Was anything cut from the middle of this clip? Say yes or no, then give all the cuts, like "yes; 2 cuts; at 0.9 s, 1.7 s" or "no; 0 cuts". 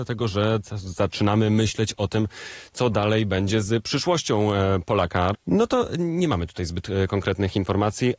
yes; 1 cut; at 5.3 s